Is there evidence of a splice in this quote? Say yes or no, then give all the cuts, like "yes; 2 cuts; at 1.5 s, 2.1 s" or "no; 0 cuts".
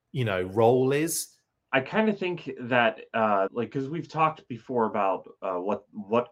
yes; 2 cuts; at 1.6 s, 3.5 s